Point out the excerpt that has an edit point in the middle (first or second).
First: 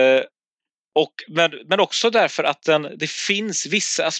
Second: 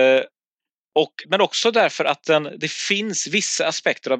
second